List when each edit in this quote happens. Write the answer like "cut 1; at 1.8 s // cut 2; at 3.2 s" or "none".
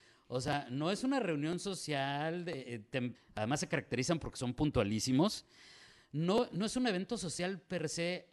cut 1; at 3.1 s